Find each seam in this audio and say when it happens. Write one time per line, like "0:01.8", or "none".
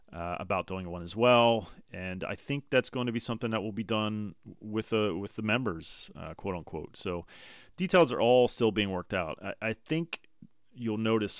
none